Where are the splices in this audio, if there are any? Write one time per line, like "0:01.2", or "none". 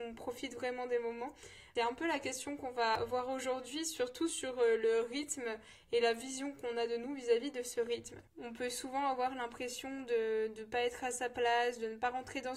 none